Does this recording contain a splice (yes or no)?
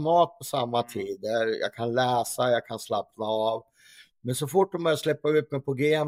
no